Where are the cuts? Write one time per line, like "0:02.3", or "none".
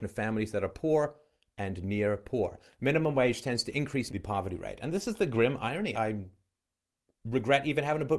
0:04.1
0:05.9

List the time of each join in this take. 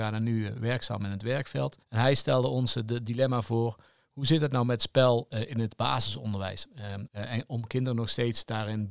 0:01.8
0:07.1

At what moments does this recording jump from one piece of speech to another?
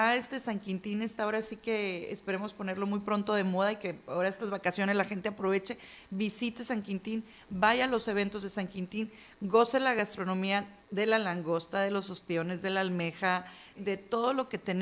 0:10.8
0:13.7

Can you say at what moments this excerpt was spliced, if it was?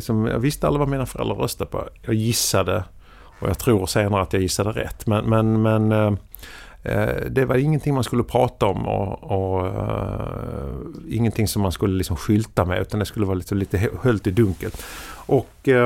none

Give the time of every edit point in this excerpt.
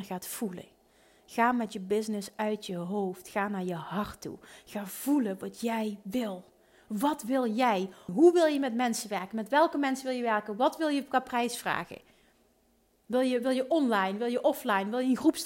0:08.1

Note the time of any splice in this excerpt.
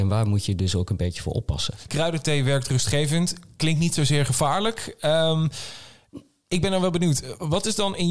0:01.9

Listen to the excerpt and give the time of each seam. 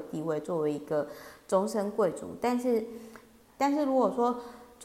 0:03.5

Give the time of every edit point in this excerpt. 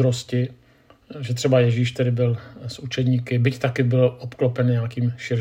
none

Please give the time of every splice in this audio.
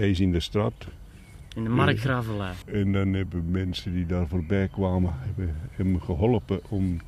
0:02.6

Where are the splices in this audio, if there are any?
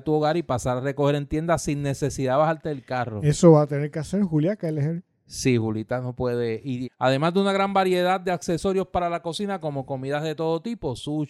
0:06.8

